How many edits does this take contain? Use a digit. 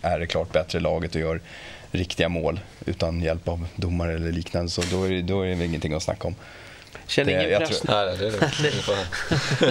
1